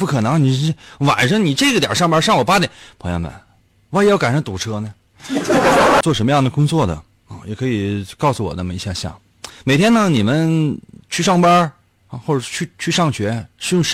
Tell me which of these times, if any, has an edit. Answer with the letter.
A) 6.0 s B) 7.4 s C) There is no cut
A